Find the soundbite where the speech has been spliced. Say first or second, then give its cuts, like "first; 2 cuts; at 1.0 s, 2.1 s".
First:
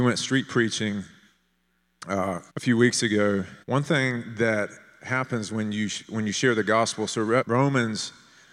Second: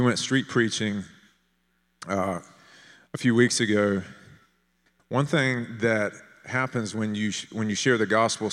first; 3 cuts; at 2.5 s, 3.6 s, 7.4 s